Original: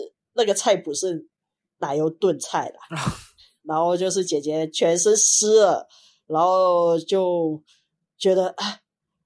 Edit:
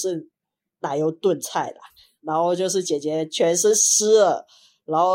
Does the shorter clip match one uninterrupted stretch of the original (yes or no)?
no